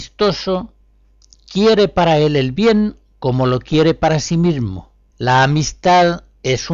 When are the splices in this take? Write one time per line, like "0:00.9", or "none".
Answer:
0:05.1